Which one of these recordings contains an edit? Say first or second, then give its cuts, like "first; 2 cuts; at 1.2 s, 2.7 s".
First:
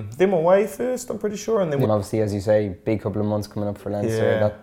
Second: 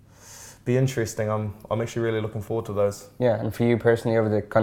first; 1 cut; at 1.8 s